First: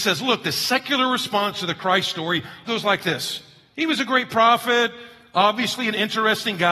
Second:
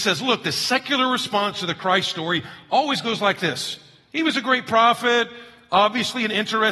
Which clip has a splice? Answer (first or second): first